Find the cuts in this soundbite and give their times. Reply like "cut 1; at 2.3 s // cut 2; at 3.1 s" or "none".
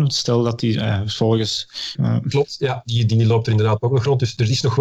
cut 1; at 1.9 s